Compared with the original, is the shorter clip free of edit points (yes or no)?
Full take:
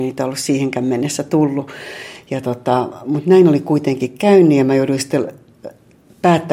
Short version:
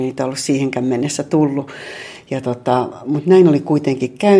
yes